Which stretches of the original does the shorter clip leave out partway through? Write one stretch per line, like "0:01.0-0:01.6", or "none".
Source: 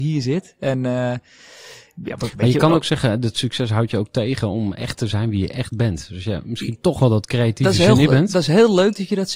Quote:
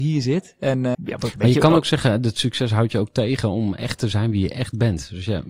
0:00.9-0:01.9

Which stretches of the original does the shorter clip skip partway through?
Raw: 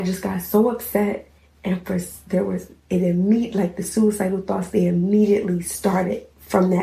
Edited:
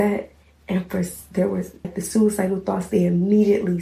0:02.8-0:03.7

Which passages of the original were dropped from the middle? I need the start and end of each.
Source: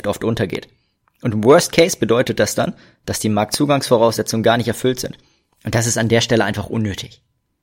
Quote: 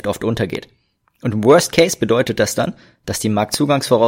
none

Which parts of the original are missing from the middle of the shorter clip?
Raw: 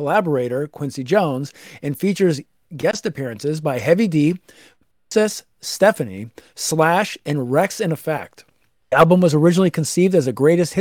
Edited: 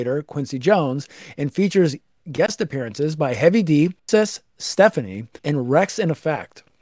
0:04.4-0:05.0
0:06.4-0:07.2

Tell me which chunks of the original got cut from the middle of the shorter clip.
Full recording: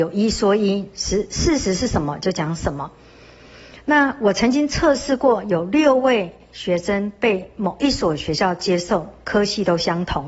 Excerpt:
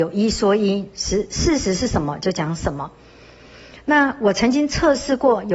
none

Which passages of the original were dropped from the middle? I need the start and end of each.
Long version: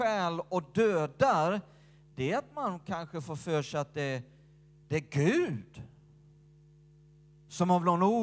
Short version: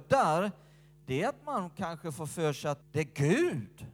0:03.9-0:04.8

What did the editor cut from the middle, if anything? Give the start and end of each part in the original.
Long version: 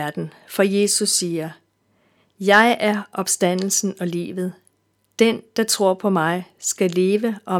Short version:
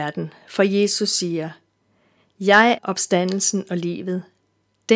0:02.8-0:03.1

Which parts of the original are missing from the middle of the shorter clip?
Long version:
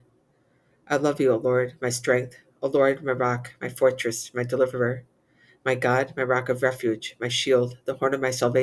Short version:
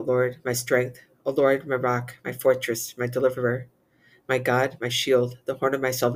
0:06.1-0:07.2

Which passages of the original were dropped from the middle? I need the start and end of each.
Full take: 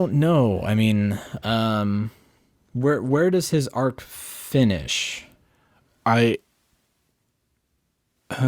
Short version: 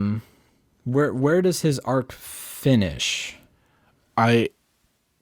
none

